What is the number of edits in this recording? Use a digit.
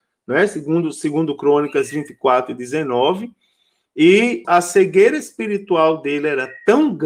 1